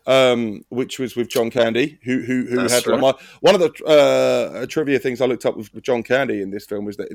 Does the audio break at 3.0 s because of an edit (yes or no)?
yes